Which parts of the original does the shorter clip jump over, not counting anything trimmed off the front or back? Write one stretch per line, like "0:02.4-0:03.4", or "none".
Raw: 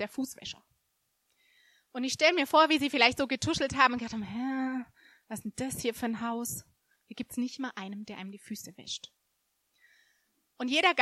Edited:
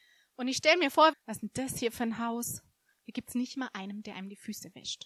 0:02.7-0:05.1